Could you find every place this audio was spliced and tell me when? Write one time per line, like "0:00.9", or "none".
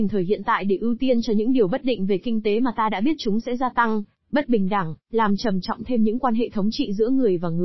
none